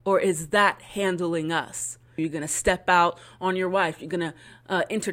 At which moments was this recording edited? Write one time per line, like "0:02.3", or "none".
0:02.2